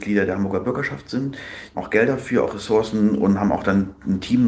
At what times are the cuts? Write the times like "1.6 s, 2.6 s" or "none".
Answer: 1.7 s